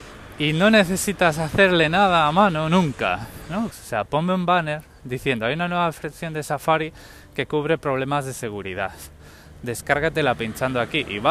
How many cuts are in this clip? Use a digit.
1